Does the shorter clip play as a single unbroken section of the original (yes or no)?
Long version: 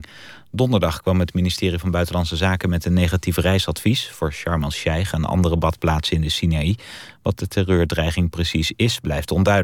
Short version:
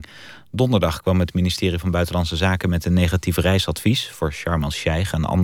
yes